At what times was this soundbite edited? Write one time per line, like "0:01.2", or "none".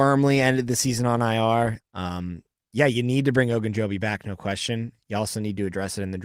0:01.8